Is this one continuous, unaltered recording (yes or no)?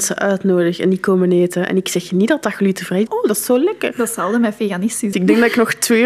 no